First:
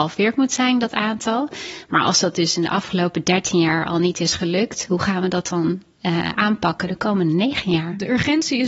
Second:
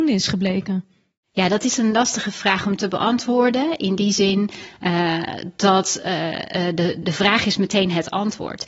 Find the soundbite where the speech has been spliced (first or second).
second